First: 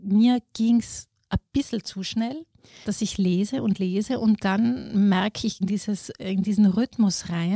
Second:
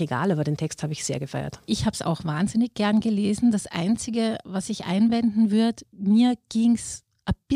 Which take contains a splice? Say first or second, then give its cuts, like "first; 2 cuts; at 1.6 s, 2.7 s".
first; 2 cuts; at 2.8 s, 5.6 s